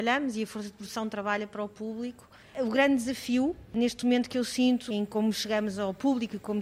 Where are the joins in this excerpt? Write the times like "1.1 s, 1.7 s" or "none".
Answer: 2.4 s, 4.9 s